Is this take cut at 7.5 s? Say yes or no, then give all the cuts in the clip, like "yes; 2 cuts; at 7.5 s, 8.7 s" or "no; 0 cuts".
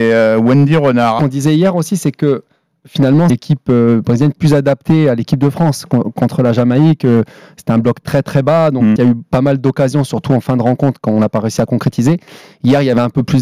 no; 3 cuts; at 1.2 s, 3.3 s, 9.0 s